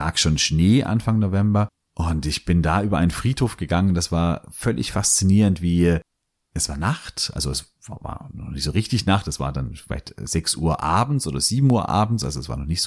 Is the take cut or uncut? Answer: uncut